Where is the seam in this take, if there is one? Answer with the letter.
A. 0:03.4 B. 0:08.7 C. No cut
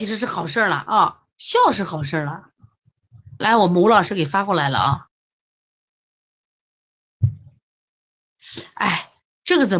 A